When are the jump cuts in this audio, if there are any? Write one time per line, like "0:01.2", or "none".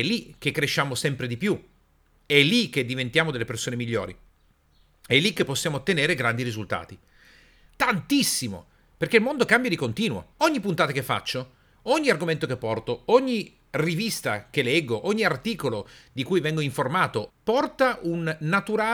0:07.7
0:10.3
0:17.3